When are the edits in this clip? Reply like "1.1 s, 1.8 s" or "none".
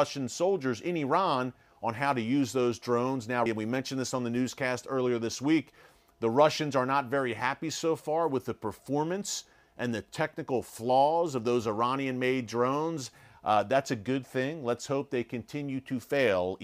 3.5 s